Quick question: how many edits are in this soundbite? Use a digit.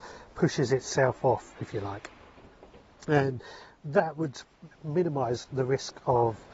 0